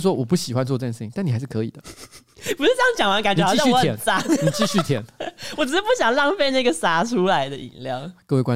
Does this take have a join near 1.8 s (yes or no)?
no